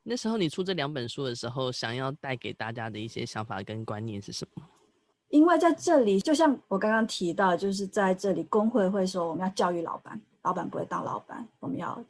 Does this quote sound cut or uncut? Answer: uncut